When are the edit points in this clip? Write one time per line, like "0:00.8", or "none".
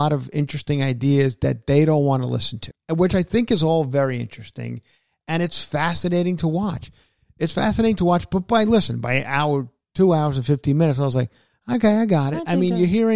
0:02.7